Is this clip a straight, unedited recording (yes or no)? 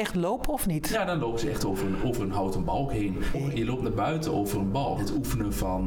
no